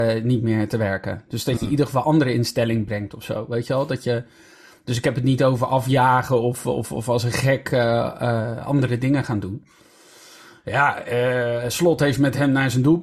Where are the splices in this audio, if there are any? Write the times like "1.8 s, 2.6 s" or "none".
none

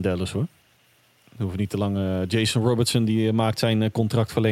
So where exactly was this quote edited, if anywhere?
none

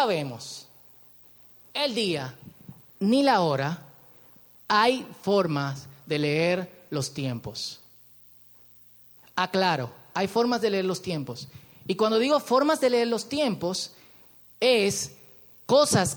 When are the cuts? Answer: none

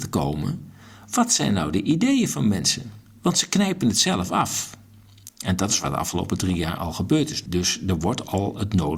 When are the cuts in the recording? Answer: 7.5 s

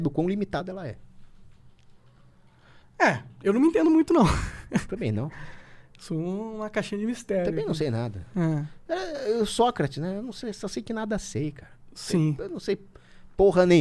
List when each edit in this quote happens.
none

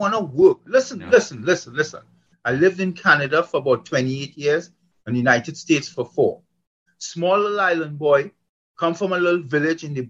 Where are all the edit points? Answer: 2.3 s, 6.9 s

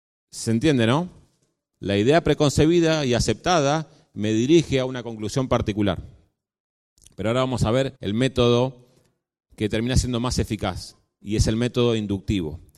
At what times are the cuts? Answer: 8.0 s

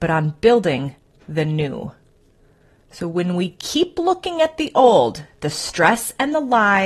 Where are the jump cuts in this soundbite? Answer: none

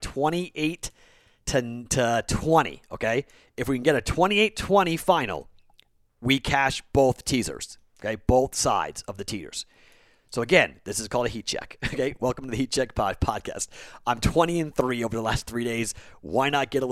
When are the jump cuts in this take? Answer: none

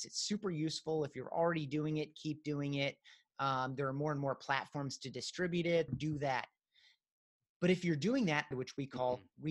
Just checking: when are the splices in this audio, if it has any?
5.9 s, 8.5 s

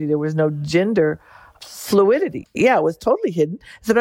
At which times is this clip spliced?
2.4 s

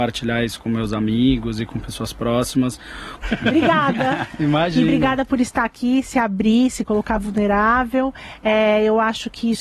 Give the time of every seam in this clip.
3.2 s

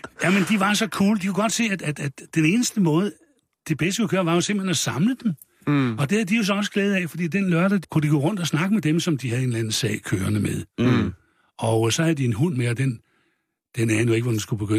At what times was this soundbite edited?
7.8 s

